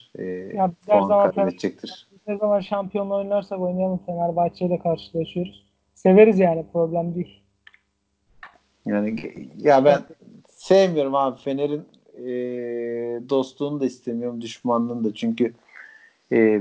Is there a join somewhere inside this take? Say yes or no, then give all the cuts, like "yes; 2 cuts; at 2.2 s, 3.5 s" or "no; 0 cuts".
no; 0 cuts